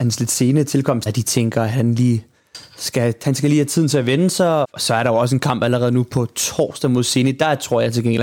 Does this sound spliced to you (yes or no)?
yes